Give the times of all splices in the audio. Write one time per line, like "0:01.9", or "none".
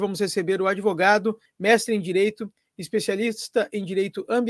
0:01.5